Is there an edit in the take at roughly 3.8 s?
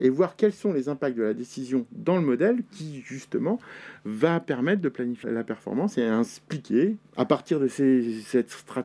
no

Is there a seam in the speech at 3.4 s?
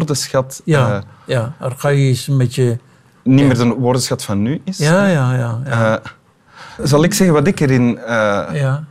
no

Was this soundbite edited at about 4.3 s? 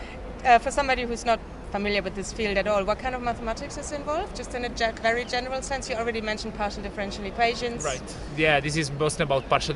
no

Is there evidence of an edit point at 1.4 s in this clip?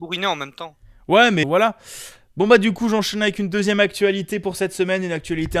yes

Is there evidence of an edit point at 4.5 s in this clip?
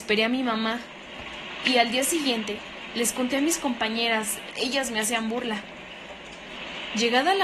yes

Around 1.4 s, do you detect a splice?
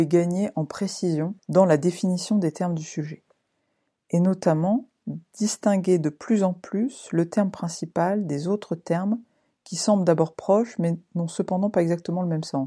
yes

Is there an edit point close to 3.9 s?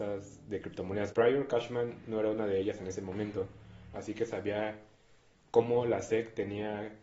yes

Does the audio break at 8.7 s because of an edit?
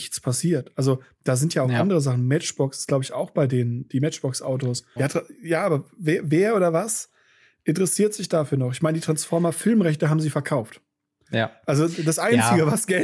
no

